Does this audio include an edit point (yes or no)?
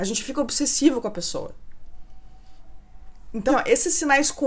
yes